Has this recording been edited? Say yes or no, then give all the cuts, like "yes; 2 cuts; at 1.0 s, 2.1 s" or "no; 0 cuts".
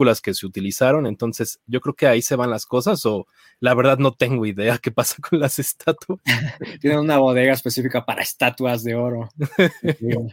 no; 0 cuts